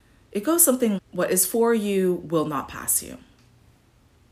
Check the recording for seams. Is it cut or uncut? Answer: cut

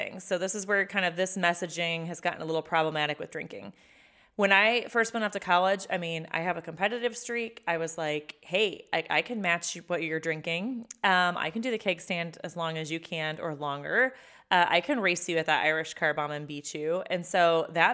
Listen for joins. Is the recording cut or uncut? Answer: uncut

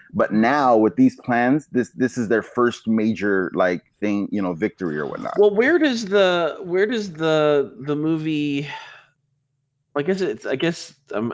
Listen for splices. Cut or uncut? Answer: uncut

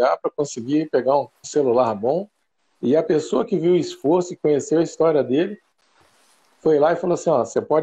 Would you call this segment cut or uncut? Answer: cut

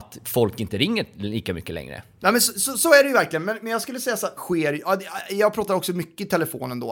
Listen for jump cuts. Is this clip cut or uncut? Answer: cut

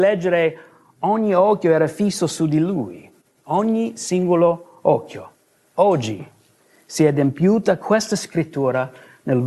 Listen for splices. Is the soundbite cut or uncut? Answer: cut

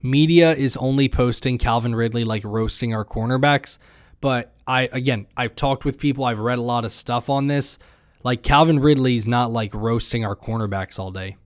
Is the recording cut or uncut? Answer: uncut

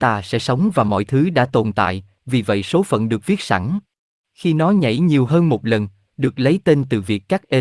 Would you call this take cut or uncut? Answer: cut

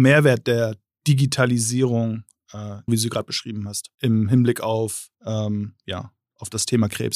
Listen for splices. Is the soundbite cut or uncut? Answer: cut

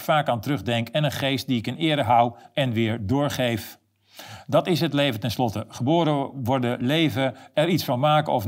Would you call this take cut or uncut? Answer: uncut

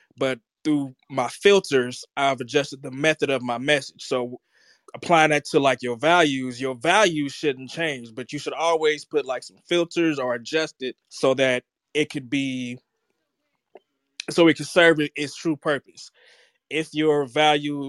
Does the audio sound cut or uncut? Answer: cut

